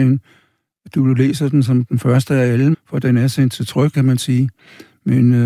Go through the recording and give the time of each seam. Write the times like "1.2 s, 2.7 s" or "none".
2.7 s, 3.9 s